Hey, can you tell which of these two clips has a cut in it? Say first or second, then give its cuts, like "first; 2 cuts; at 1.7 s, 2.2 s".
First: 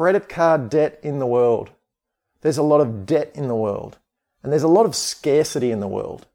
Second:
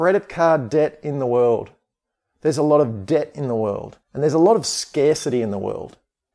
second; 1 cut; at 4.0 s